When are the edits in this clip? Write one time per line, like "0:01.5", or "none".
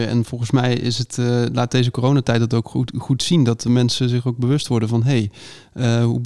none